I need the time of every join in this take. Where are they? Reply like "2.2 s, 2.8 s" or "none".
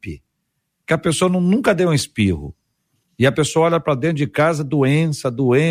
none